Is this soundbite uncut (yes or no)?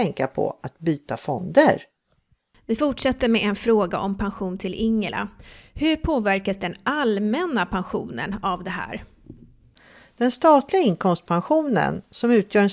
yes